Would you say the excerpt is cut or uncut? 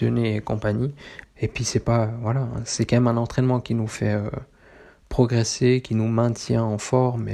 cut